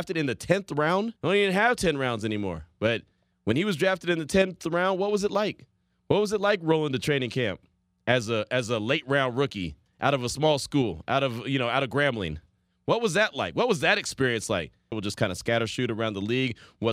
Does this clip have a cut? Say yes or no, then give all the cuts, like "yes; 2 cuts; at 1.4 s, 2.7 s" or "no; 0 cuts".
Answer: yes; 2 cuts; at 1.2 s, 14.9 s